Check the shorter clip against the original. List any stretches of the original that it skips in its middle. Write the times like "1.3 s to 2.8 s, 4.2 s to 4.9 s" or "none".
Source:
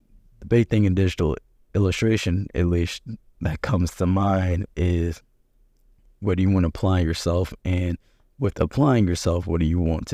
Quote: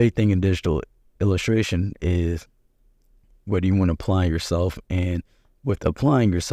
2.5 s to 4.7 s